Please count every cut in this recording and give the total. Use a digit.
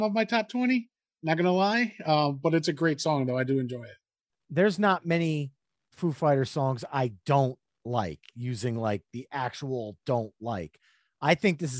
0